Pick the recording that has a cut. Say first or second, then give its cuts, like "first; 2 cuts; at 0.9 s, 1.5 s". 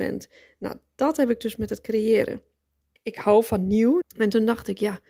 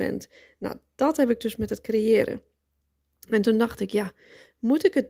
first; 2 cuts; at 3.0 s, 4.0 s